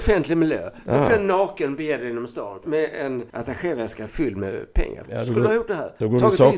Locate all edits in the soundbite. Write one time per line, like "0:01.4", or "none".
0:02.6
0:05.0